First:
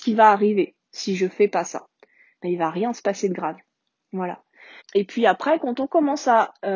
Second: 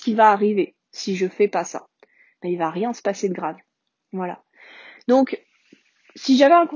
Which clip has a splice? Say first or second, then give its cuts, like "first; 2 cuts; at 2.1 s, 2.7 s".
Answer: first; 1 cut; at 4.8 s